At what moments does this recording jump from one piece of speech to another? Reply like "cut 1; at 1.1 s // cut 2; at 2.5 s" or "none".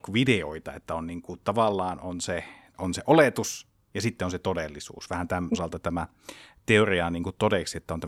cut 1; at 2.7 s // cut 2; at 5.5 s